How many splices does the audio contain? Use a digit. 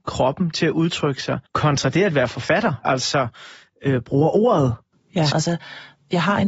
3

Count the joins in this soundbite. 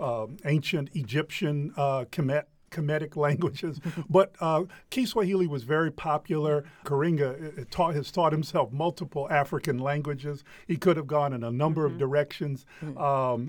1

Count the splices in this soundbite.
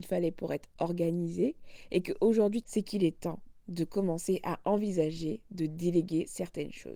1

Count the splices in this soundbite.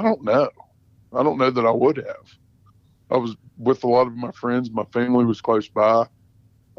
0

